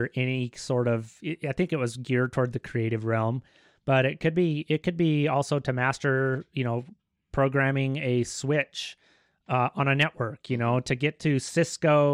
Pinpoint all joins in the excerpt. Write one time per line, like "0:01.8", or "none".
none